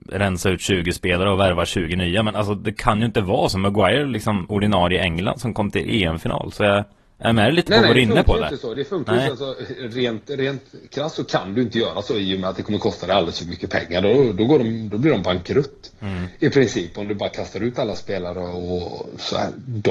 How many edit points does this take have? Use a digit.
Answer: 0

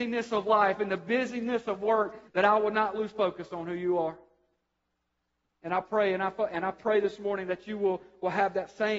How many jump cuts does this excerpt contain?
1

